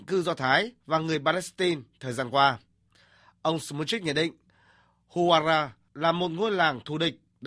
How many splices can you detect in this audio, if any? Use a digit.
0